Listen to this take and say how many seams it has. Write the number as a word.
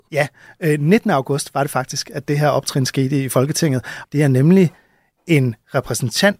one